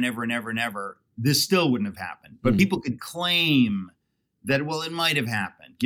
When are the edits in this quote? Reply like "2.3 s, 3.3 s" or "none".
none